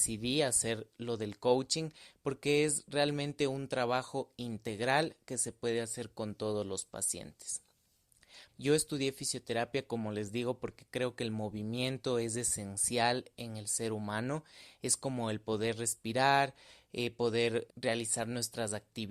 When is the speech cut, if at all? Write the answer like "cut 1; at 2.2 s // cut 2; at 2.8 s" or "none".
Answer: cut 1; at 8.5 s // cut 2; at 17.7 s